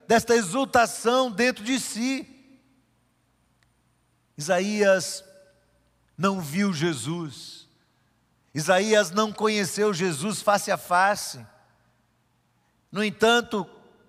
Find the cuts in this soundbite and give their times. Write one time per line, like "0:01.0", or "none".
none